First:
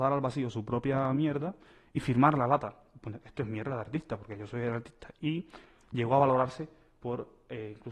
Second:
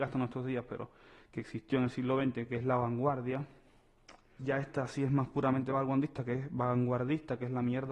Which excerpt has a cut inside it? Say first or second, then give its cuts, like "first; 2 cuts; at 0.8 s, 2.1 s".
second; 1 cut; at 4.4 s